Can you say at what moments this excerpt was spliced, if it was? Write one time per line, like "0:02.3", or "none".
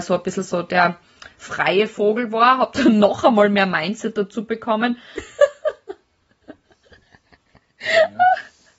0:05.2

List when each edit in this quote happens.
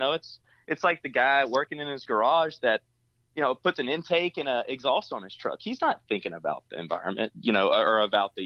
none

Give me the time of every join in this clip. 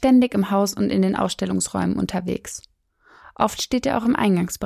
none

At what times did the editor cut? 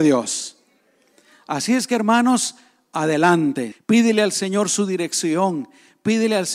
0:03.7

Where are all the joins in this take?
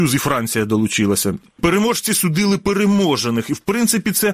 none

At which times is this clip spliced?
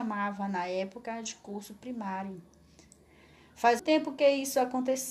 0:03.8

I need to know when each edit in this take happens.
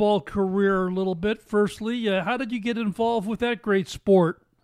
none

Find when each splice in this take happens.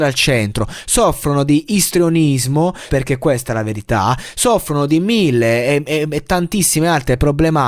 0:02.9

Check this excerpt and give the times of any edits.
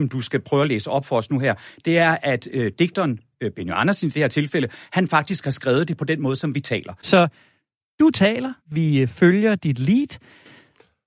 0:07.0
0:08.6

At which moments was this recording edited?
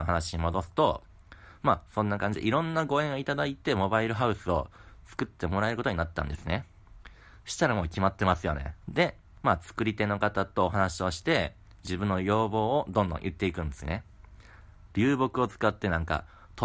0:08.8
0:14.9

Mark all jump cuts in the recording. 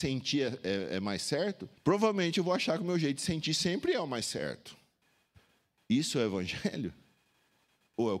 0:01.8

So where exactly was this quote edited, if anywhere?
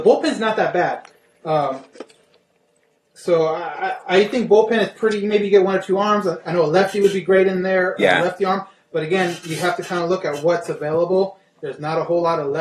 none

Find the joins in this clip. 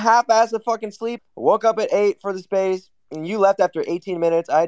0:01.2

